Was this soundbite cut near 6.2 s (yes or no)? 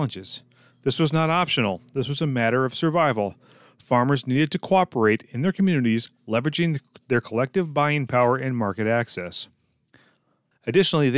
no